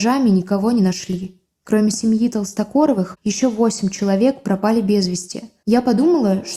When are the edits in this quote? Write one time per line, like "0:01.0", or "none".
0:05.6

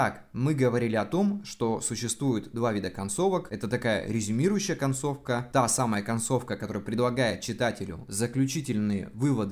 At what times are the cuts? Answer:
none

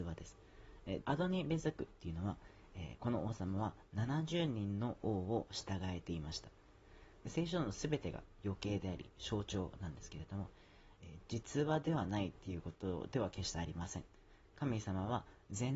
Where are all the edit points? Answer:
0:01.0
0:07.2
0:11.0

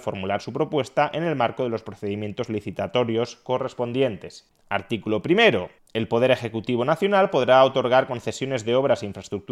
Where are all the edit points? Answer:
0:04.5

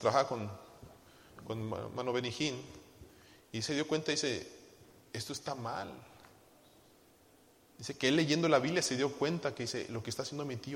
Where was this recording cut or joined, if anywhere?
none

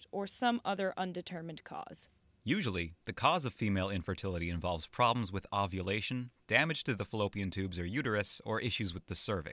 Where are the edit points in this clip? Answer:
none

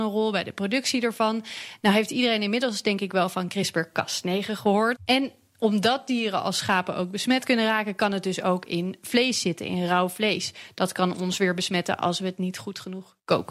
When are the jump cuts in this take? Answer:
0:05.0

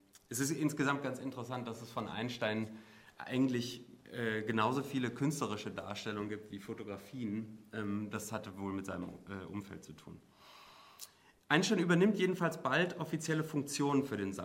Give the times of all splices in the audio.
none

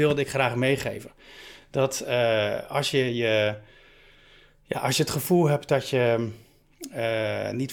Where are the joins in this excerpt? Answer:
none

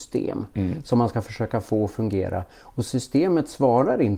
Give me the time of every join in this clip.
none

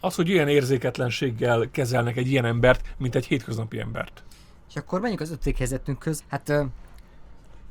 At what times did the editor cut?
0:06.2

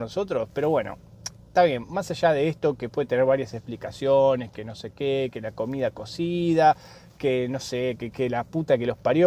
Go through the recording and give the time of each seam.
0:08.1

